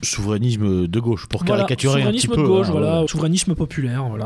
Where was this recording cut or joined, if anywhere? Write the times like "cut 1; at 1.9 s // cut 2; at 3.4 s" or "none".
cut 1; at 3.1 s